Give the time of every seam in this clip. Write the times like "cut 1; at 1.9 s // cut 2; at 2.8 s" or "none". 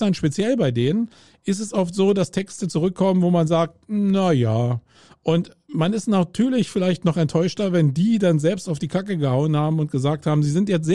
none